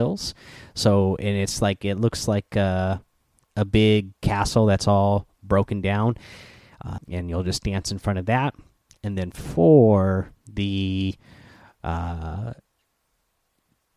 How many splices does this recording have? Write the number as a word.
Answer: one